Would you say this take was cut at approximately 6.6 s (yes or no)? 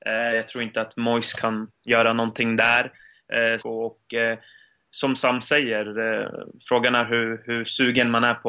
no